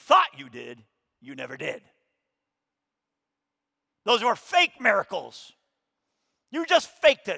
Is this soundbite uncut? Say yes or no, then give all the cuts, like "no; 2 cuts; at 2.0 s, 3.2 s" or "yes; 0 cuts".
yes; 0 cuts